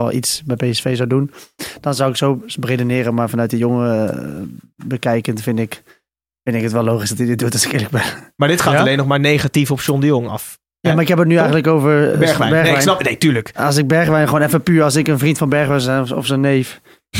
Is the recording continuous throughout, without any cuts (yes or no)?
yes